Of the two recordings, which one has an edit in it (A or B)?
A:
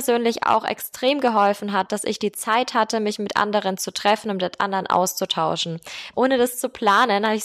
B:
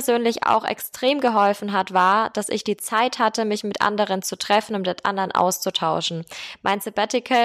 A